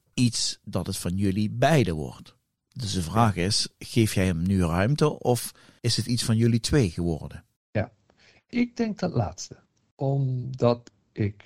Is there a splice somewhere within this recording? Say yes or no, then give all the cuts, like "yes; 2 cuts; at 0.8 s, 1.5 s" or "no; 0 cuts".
no; 0 cuts